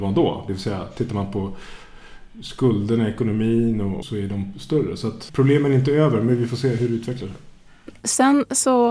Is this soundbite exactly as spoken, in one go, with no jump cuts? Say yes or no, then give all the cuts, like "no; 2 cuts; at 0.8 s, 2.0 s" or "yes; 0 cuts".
no; 2 cuts; at 4.0 s, 5.3 s